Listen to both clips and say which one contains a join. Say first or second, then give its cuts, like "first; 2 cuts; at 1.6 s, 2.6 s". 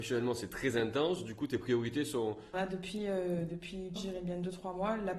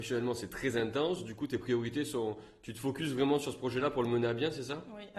first; 2 cuts; at 2.5 s, 4.0 s